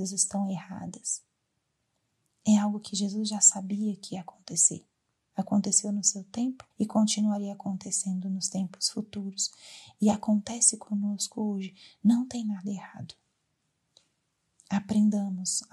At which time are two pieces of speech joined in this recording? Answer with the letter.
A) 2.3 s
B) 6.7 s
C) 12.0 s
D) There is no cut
B